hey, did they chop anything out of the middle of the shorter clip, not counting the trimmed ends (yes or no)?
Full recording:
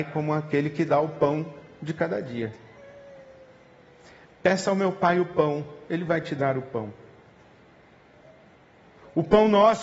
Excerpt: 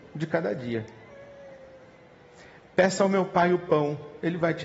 no